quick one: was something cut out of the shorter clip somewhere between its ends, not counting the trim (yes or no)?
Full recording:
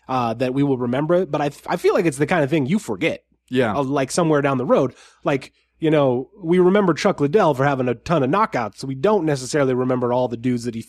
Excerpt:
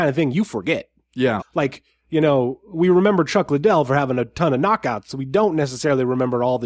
yes